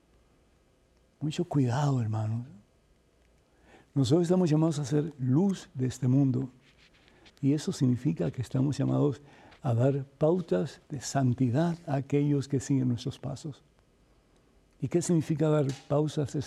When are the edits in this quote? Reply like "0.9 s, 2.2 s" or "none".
7.3 s, 10.9 s